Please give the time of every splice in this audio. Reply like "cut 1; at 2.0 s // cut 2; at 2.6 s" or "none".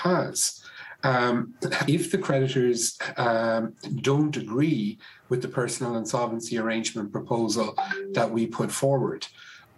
cut 1; at 1.9 s